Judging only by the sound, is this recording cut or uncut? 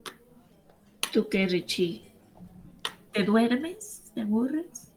cut